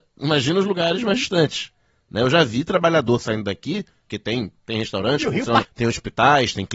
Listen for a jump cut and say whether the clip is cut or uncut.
cut